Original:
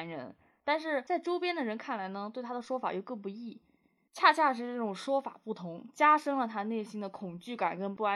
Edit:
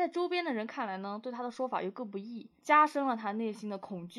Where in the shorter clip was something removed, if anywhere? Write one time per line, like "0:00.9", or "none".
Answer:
0:02.6

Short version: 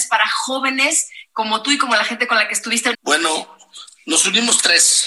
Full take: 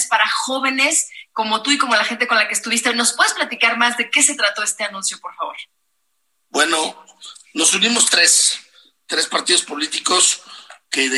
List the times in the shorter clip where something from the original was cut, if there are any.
0:02.9

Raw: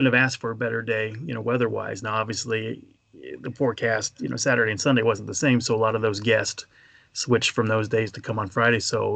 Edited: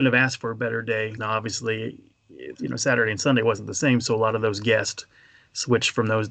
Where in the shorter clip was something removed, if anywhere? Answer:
0:01.2
0:02.5

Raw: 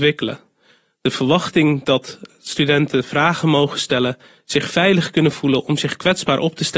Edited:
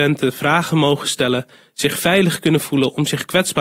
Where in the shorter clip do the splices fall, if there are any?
none

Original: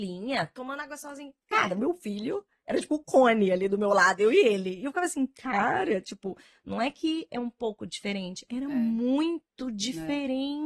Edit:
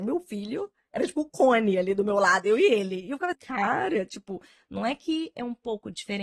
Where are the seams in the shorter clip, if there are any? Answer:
0:03.3

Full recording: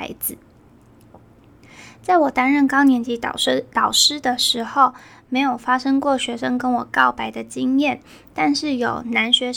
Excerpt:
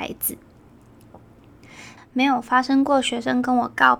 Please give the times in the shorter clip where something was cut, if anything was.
0:02.0

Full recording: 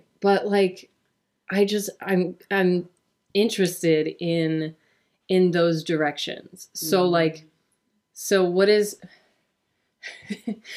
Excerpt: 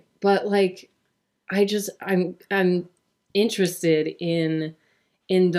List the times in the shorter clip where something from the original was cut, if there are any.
none

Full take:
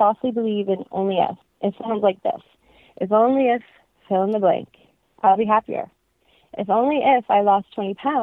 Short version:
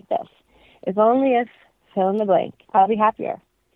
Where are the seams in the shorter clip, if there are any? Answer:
0:02.6

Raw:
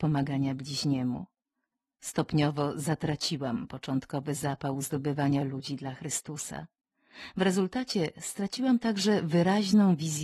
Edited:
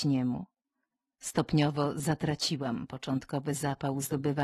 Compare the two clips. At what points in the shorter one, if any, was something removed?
none

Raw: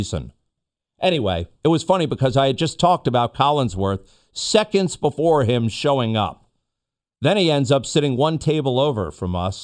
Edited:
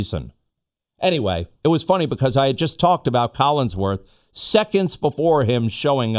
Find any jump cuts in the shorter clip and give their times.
none

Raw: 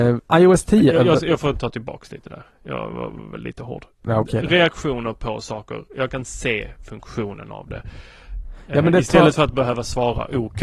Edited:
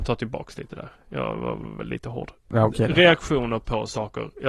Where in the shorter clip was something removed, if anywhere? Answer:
none

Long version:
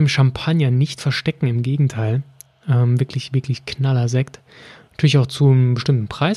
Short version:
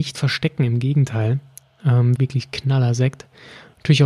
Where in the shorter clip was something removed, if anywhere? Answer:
0:02.2

